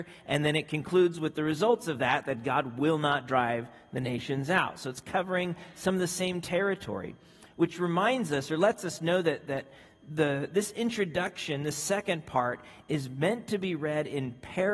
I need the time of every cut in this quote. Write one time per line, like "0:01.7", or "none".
none